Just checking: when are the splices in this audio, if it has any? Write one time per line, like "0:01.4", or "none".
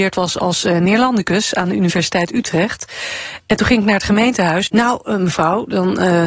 0:04.7